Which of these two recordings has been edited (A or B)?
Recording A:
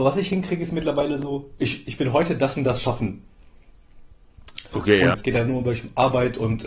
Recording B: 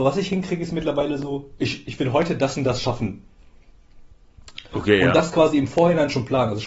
A